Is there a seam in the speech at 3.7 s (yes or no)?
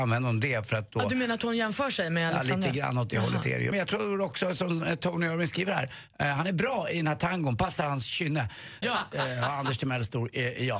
yes